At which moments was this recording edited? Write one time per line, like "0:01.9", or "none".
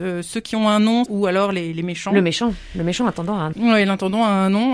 0:01.1
0:03.5